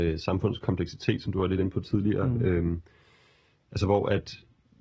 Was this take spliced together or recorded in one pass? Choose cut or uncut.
uncut